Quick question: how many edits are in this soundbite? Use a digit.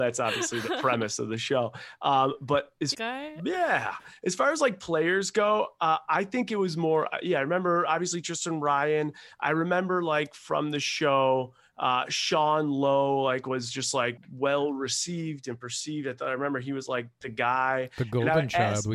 2